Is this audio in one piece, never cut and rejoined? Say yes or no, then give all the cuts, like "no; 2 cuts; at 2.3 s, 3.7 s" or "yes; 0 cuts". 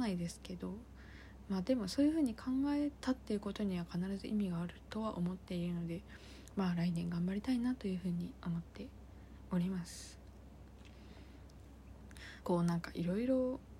no; 1 cut; at 12.4 s